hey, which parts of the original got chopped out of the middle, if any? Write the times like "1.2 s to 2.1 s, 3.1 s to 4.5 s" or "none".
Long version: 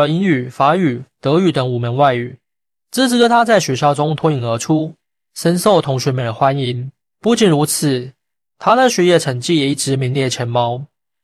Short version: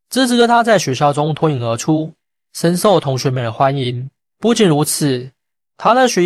none